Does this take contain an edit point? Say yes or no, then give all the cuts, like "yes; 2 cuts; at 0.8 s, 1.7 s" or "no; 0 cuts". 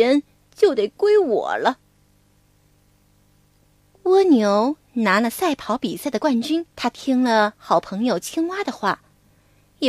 yes; 1 cut; at 6.7 s